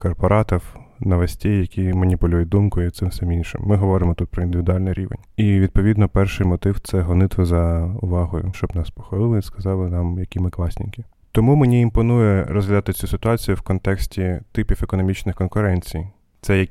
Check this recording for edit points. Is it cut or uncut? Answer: cut